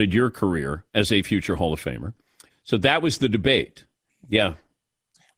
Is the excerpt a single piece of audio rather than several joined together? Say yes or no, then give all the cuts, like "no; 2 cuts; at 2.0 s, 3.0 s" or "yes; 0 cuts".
no; 2 cuts; at 2.5 s, 4.1 s